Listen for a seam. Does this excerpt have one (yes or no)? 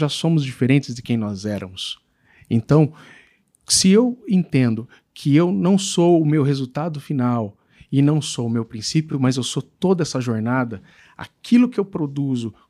no